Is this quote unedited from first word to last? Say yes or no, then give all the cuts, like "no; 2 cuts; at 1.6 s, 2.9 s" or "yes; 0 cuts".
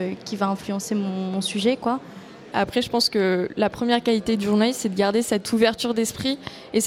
no; 1 cut; at 2.5 s